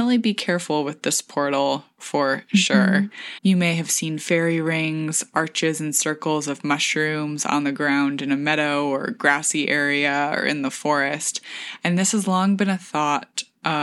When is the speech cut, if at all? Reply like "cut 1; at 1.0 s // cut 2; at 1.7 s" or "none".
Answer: cut 1; at 3.4 s